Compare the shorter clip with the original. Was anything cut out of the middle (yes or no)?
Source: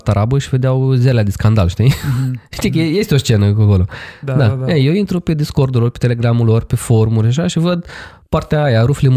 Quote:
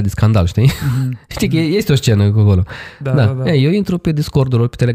no